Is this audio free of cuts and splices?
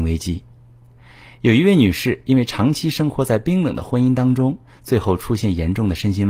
yes; 0 cuts

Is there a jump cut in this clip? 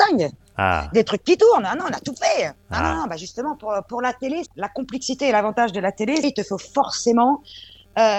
yes; 2 cuts; at 4.5 s, 6.2 s

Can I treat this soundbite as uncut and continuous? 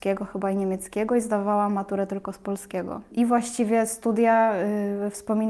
no; 1 cut; at 3.1 s

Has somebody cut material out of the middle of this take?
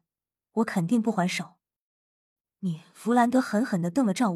yes; 1 cut; at 2.4 s

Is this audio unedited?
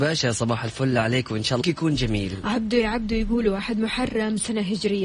no; 1 cut; at 1.6 s

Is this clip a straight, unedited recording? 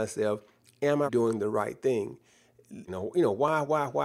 no; 2 cuts; at 1.1 s, 2.9 s

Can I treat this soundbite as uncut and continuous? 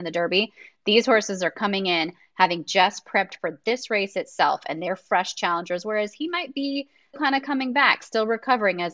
no; 1 cut; at 7.1 s

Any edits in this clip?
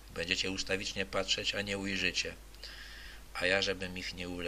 yes; 1 cut; at 3.3 s

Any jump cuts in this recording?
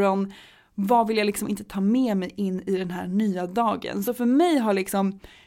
no; 0 cuts

